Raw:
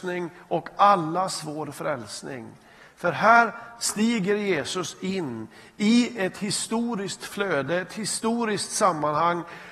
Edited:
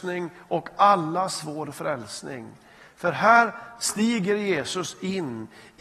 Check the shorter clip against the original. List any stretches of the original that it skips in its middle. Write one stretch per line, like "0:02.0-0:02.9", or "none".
none